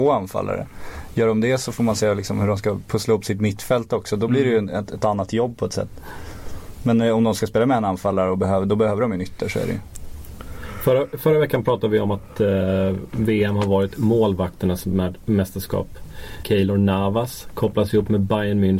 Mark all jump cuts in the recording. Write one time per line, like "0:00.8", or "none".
0:16.4